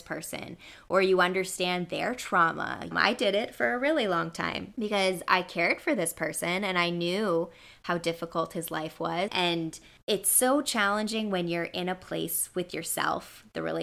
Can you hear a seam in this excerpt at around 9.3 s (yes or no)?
yes